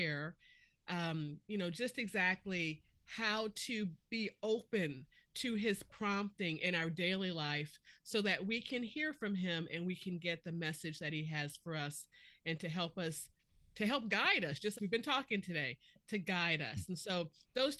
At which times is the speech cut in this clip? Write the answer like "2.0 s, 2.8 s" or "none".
14.8 s